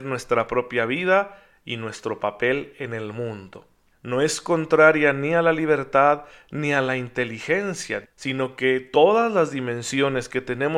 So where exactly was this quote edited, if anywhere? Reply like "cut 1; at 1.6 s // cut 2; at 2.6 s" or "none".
cut 1; at 3.9 s // cut 2; at 8.0 s